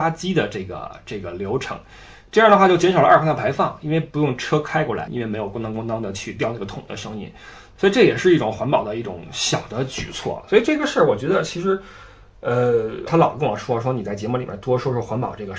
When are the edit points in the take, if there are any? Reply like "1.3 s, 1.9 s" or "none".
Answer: 5.1 s, 13.1 s